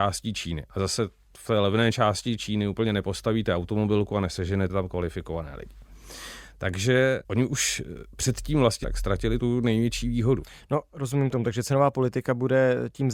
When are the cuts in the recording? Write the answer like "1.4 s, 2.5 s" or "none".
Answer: 8.8 s